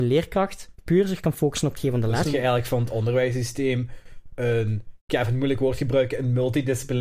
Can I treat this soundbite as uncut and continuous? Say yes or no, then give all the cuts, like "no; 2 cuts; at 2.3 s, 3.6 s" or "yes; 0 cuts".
no; 1 cut; at 2.2 s